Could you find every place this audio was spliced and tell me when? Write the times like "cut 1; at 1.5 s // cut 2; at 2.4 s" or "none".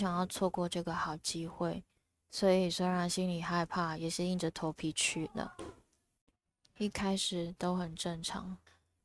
none